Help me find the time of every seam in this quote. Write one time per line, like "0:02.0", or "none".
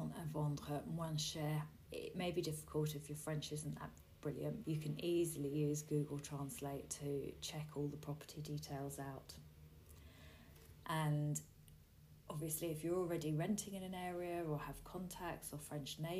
0:01.9
0:04.6
0:10.8